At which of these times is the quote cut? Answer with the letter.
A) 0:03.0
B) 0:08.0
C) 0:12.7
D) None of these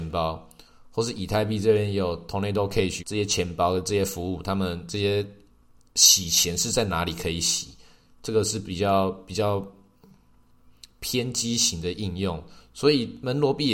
A